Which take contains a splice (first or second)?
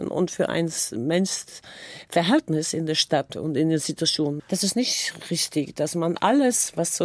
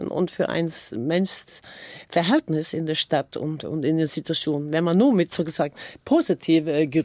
first